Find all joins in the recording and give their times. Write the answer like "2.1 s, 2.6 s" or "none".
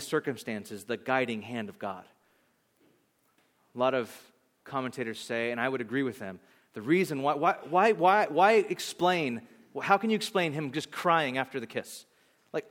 none